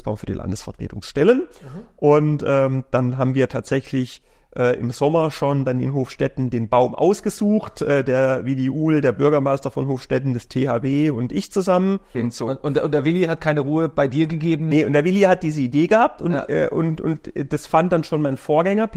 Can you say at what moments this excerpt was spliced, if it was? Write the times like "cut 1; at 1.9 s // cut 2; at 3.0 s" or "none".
cut 1; at 12.1 s